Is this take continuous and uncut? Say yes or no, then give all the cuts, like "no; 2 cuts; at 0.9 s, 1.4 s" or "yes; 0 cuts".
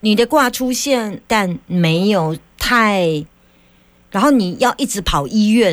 no; 1 cut; at 1.2 s